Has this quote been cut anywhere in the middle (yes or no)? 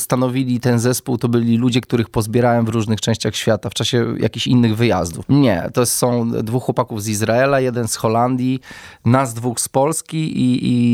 yes